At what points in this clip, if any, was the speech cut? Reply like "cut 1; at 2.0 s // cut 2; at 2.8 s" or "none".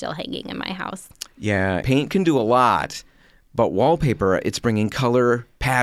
cut 1; at 1.8 s